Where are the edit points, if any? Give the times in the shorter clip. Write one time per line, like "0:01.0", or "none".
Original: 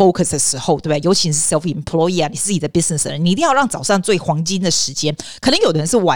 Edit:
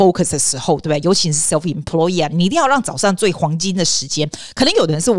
0:02.3

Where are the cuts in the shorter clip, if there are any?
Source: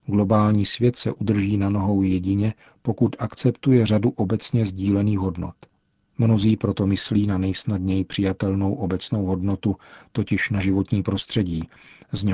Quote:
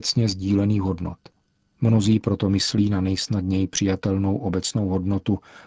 none

